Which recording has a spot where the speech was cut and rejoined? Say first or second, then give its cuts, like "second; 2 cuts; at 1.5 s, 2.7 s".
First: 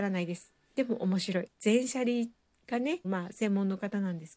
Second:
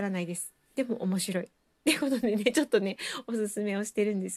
first; 2 cuts; at 1.5 s, 3.0 s